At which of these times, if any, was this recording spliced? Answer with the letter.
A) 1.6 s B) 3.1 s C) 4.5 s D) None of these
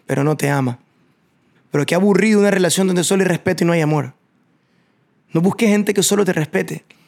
A